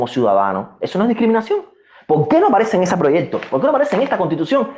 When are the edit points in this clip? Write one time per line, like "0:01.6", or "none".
none